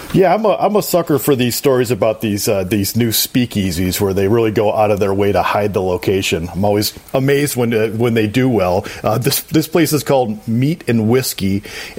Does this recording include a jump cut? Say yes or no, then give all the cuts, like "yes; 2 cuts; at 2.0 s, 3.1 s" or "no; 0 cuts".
no; 0 cuts